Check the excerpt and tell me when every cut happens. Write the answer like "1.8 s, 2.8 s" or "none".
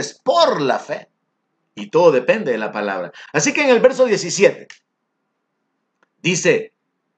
3.3 s